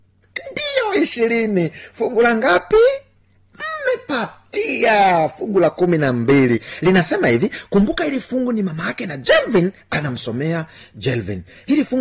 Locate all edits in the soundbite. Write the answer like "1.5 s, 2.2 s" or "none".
none